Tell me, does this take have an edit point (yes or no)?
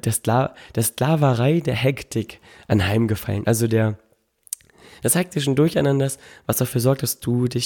no